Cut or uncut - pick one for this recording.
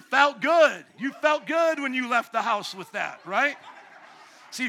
uncut